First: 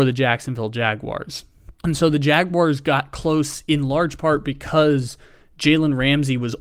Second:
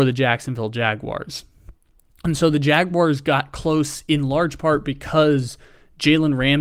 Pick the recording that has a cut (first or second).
first